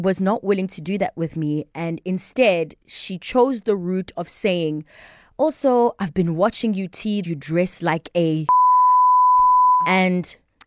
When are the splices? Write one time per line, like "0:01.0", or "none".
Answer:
0:07.2